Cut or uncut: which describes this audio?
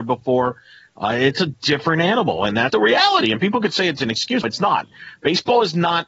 cut